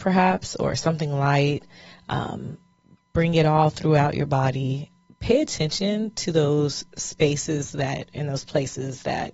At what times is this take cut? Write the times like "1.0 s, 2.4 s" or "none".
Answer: none

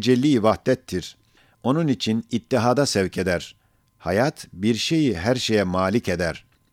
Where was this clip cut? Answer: none

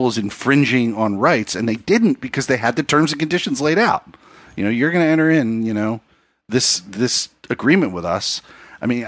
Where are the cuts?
none

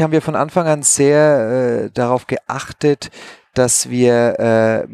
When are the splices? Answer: none

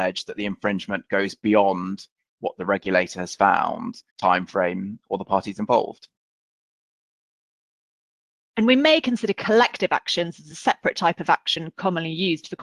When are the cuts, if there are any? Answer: 4.1 s

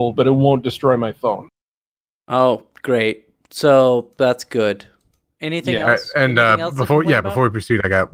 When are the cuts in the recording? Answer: none

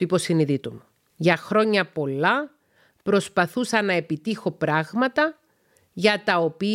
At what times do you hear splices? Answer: 1.1 s

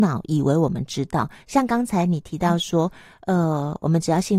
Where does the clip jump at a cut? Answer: none

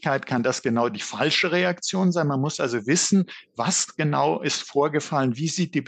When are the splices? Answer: none

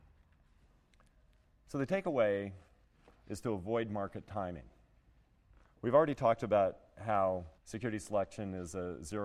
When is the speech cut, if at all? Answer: 5.7 s, 7.6 s

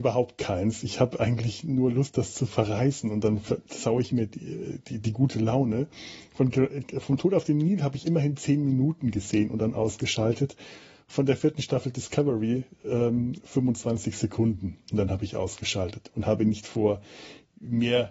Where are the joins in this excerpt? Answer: 13.4 s

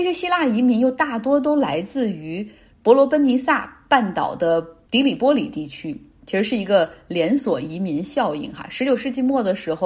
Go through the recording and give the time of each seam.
none

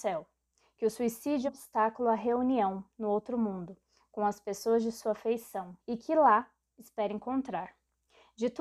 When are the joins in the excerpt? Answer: 1.5 s, 5.8 s

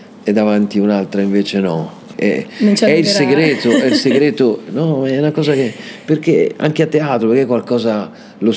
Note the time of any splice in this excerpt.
2.1 s

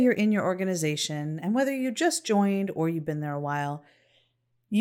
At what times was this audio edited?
none

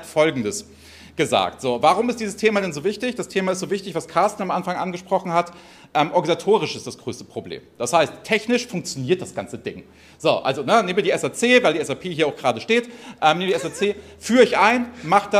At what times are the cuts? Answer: none

